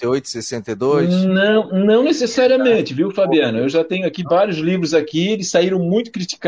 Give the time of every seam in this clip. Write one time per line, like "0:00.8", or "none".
none